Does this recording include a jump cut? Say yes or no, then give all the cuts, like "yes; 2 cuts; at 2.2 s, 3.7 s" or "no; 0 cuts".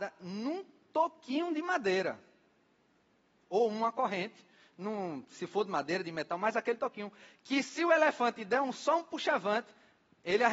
no; 0 cuts